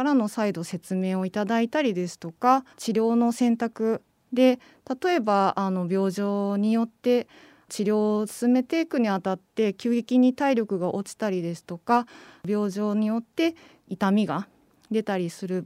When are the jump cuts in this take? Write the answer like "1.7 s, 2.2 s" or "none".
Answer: 2.7 s